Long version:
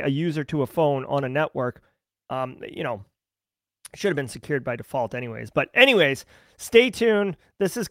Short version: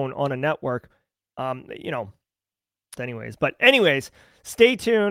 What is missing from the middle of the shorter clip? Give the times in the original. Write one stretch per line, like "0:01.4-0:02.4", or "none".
0:03.9-0:05.1

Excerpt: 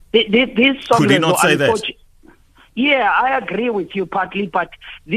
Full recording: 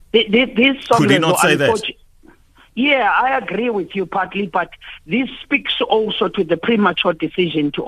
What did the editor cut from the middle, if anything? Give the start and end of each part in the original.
none

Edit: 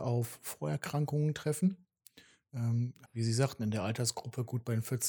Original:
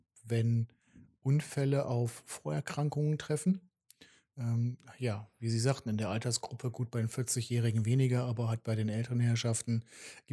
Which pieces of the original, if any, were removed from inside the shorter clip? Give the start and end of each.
0:04.9-0:05.3

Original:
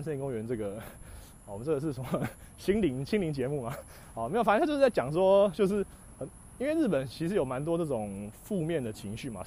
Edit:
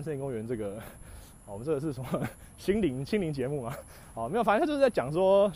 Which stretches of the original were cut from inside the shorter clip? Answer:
none

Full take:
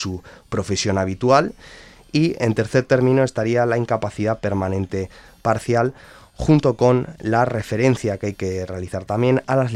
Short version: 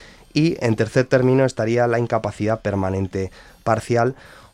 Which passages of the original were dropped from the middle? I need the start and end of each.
none

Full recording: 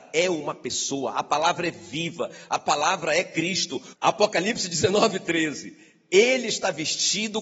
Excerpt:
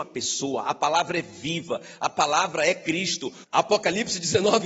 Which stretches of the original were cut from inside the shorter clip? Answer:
none

